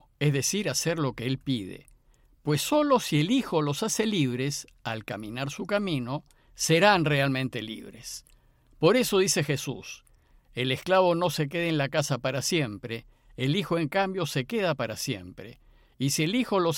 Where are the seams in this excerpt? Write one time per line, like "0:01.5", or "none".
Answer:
none